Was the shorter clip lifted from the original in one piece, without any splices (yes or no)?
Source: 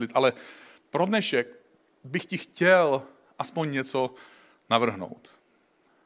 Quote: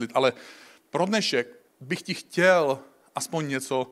no